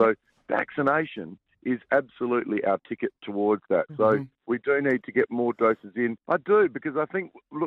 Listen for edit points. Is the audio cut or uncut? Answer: cut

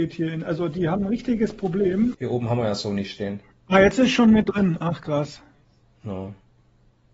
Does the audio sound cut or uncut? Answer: cut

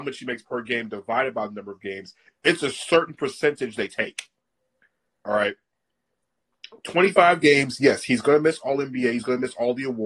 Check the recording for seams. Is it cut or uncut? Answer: uncut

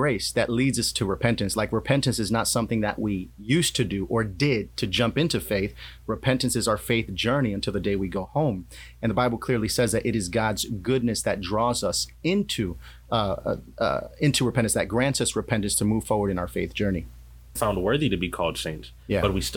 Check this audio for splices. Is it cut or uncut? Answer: cut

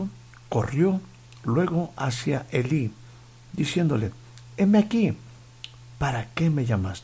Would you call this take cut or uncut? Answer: uncut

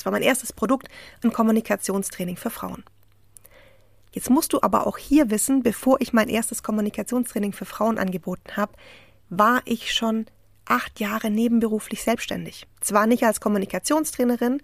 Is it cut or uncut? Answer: uncut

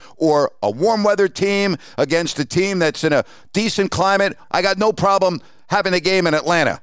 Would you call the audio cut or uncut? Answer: cut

